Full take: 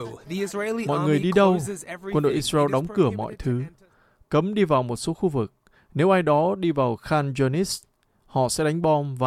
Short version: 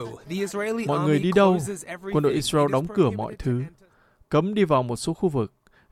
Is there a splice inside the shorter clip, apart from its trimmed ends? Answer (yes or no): no